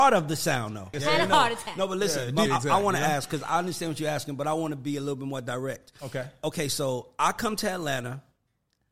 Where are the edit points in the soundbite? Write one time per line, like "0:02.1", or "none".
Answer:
0:00.9
0:02.5